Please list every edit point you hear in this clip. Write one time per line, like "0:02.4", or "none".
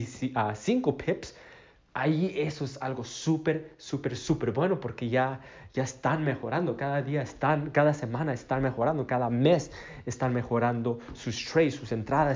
none